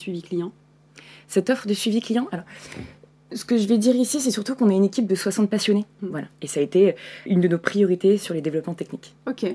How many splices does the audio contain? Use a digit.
2